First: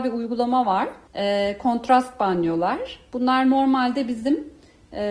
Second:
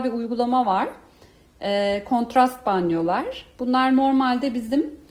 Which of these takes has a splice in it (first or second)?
first